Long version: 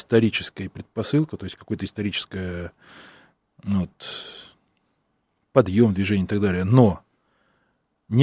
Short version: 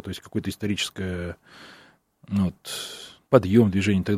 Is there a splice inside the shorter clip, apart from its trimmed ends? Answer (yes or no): yes